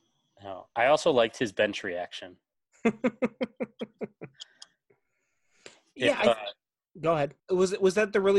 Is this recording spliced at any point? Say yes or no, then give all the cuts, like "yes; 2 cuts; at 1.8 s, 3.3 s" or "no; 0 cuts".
yes; 1 cut; at 7.4 s